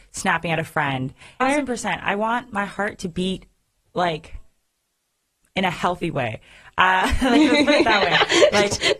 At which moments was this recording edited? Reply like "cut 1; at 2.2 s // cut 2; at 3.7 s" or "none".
cut 1; at 1.4 s